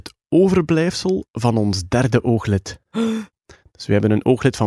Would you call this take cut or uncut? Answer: uncut